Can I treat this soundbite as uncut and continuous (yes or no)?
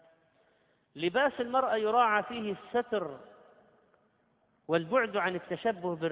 yes